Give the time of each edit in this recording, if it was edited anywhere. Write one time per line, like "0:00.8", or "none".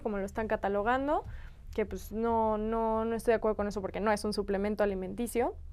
none